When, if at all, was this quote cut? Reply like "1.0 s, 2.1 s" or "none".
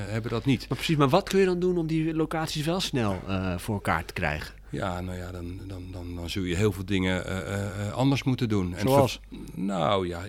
none

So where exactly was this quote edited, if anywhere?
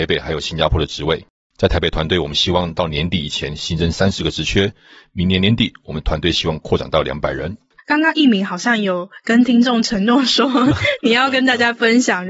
7.8 s

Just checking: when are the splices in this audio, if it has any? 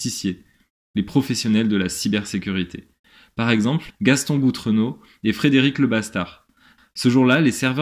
3.9 s, 6.8 s

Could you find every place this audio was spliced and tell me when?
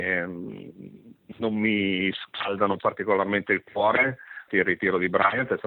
4.5 s

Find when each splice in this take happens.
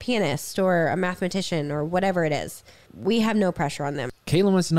2.9 s

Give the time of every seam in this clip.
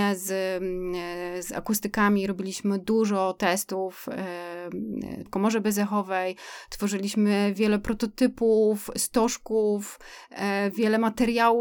5.3 s

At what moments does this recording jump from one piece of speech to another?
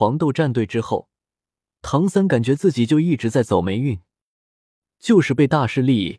4.9 s

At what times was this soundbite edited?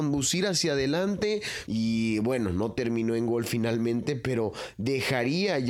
1.7 s

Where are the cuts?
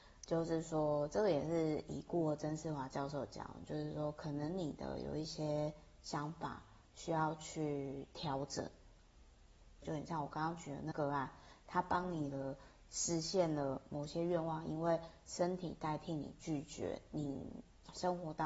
9.8 s, 10.9 s

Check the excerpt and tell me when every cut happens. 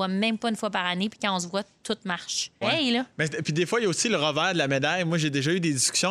2.6 s

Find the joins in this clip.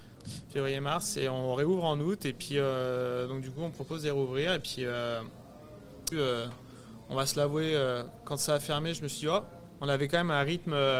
6.1 s, 9.8 s

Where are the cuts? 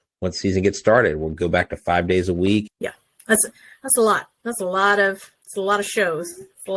2.7 s

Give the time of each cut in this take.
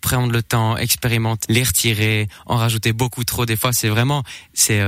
1.4 s

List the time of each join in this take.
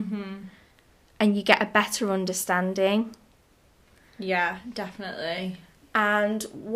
none

